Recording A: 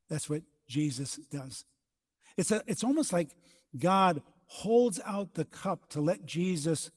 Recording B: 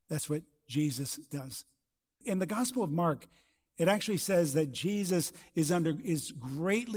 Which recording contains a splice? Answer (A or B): B